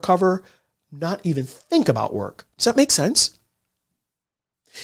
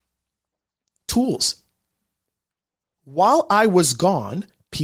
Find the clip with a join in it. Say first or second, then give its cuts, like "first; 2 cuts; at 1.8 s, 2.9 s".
first; 1 cut; at 2.5 s